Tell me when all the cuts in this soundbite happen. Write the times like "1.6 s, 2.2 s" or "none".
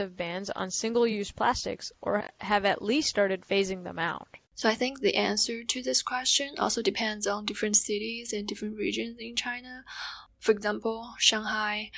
4.4 s